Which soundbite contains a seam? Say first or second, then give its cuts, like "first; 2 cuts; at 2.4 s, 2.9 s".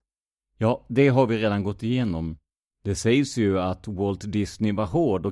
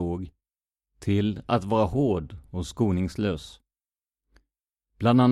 first; 1 cut; at 2.7 s